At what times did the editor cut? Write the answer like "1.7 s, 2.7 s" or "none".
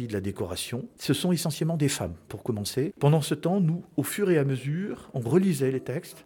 1.0 s, 2.9 s

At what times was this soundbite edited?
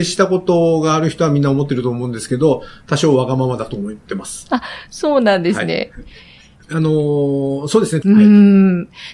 6.6 s, 8.0 s

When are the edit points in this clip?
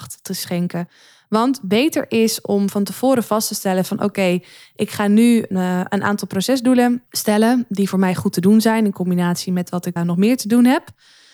5.5 s, 7.1 s, 10.0 s

